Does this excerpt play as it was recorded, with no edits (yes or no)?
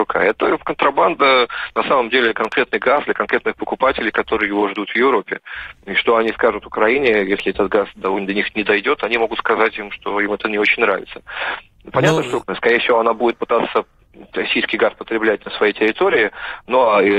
no